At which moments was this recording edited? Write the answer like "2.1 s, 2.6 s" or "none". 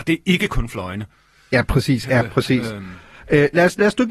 2.0 s